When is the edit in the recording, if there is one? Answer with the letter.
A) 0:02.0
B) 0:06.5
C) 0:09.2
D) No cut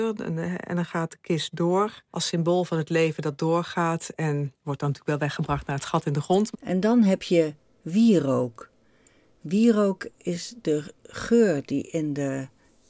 B